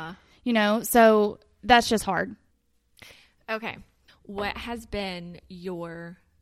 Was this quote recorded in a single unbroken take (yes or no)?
no